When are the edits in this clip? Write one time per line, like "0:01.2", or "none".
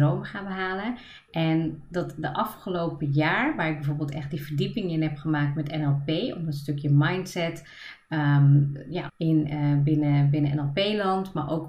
0:09.1